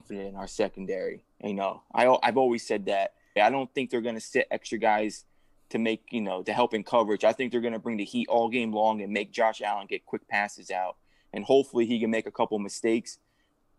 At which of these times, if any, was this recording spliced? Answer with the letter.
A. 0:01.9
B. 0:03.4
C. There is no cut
B